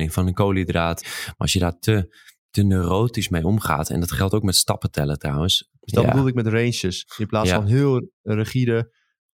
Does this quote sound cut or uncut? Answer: cut